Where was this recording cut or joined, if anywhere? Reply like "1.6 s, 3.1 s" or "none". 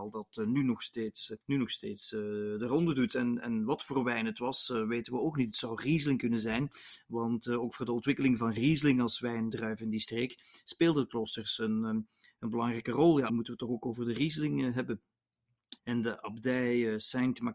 1.4 s, 13.3 s, 15.8 s